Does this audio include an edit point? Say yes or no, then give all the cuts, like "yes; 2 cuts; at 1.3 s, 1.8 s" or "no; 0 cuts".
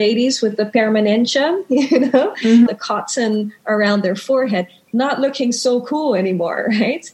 yes; 1 cut; at 2.7 s